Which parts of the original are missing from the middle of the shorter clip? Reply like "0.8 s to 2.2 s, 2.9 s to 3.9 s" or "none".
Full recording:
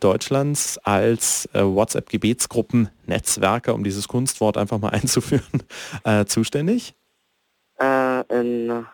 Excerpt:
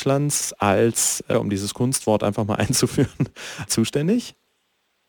1.6 s to 3.7 s, 6.0 s to 6.3 s